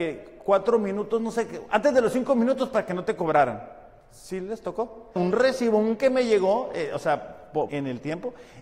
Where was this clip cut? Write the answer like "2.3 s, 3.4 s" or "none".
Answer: 5.2 s, 7.7 s